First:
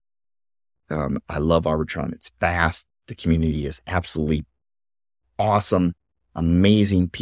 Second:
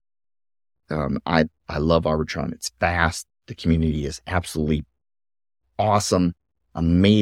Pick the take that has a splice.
first; 1 cut; at 1.2 s

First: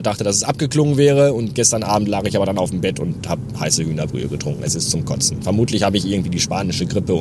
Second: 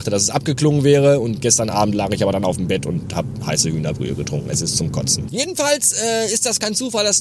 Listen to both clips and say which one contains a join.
second; 1 cut; at 5.3 s

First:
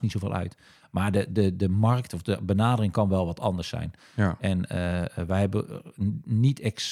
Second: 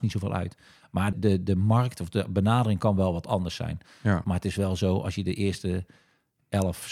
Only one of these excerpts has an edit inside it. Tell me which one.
second; 2 cuts; at 1.1 s, 4.2 s

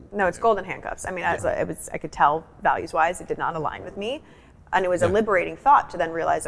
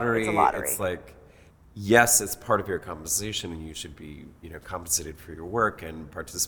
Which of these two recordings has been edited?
first; 2 cuts; at 1.4 s, 4.5 s

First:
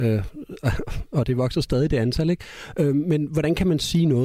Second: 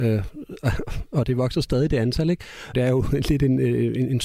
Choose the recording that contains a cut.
second; 1 cut; at 2.7 s

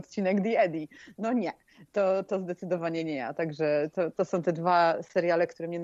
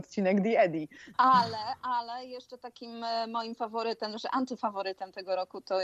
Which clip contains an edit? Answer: second; 1 cut; at 1.1 s

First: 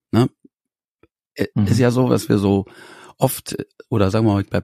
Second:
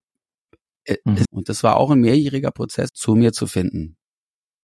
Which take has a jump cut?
second; 2 cuts; at 1.2 s, 2.9 s

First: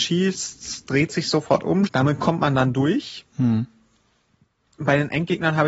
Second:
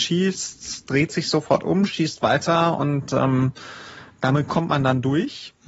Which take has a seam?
first; 1 cut; at 1.9 s

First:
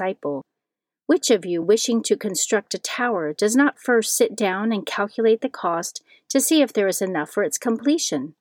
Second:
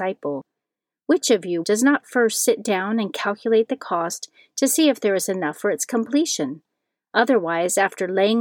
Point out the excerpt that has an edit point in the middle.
second; 1 cut; at 1.6 s

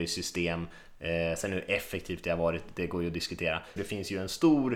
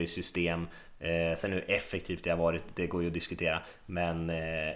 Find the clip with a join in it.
first; 1 cut; at 3.8 s

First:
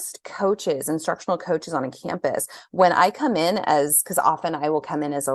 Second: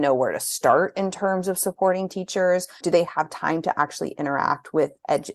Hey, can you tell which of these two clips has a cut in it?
second; 1 cut; at 2.8 s

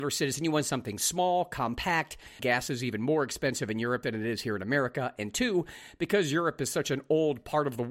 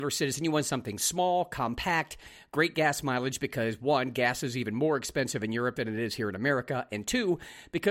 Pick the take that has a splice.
first; 1 cut; at 2.4 s

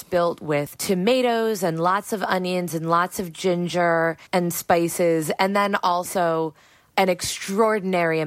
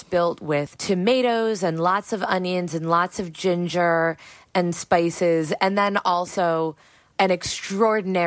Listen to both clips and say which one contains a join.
first; 1 cut; at 4.3 s

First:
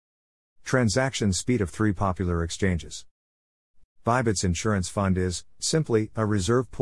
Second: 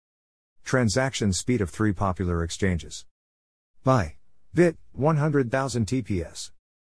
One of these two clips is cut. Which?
first; 2 cuts; at 3.8 s, 5.6 s

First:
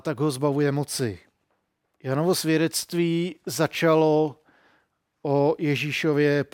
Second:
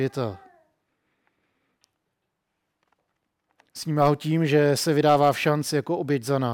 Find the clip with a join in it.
first; 1 cut; at 1.9 s

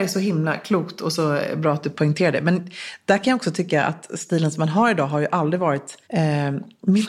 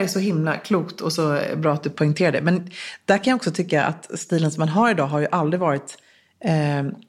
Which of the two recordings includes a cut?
first; 1 cut; at 6.0 s

